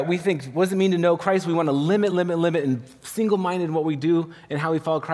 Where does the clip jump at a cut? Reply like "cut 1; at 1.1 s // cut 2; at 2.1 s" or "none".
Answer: cut 1; at 2.1 s